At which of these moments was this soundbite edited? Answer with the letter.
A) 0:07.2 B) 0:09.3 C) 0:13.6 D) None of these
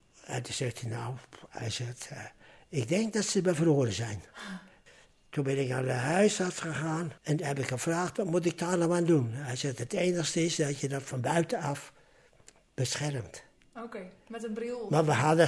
A